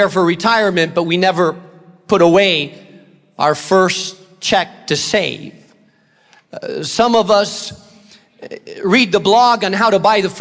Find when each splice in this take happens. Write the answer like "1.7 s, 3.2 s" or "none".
none